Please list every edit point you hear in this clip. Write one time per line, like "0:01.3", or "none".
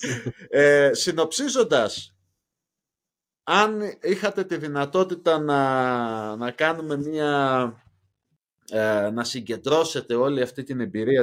none